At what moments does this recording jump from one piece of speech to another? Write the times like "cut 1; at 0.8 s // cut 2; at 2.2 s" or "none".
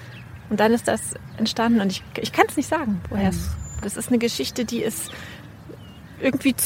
cut 1; at 3.8 s